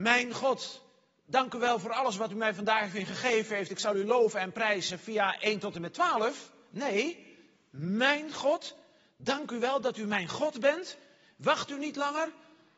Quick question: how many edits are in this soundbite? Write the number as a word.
zero